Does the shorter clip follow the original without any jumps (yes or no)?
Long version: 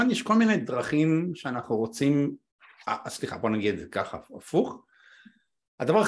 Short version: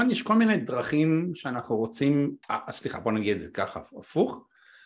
no